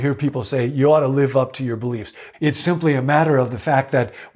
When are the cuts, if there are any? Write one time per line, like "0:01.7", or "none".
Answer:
0:02.3